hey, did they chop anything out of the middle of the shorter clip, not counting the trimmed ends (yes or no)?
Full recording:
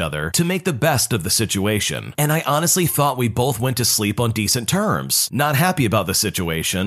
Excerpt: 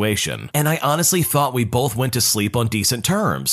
no